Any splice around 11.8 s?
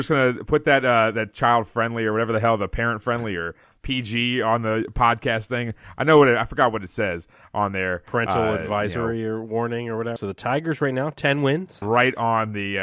yes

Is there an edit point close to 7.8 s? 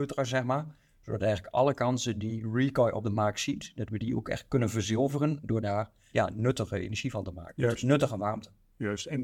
no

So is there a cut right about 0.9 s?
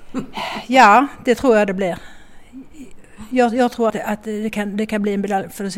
no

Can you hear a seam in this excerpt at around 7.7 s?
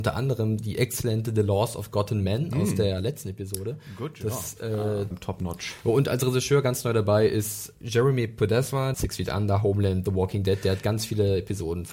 yes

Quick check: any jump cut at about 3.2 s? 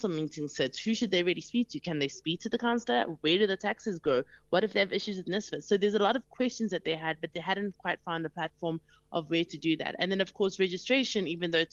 no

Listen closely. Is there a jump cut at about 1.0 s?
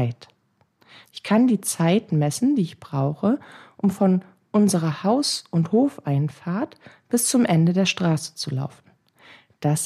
yes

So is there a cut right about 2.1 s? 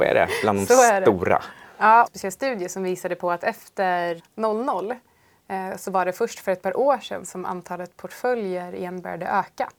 yes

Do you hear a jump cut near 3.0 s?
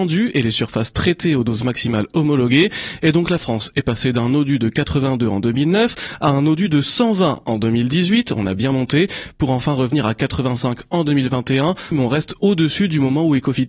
no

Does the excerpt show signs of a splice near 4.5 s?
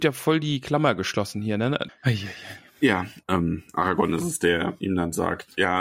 no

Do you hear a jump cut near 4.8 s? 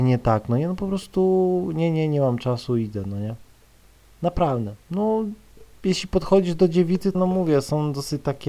yes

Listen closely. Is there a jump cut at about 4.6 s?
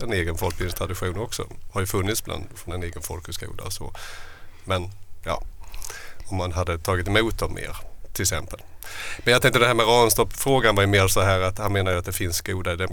no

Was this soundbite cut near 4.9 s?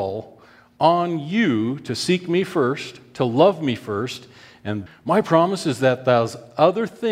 yes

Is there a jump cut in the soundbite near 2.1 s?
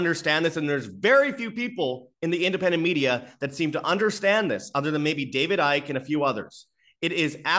yes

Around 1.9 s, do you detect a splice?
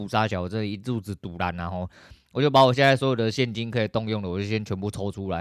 no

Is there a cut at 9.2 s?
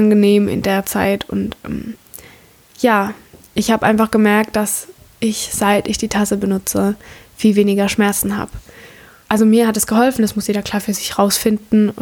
yes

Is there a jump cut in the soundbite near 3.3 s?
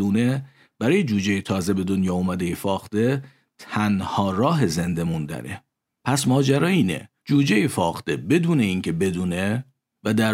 no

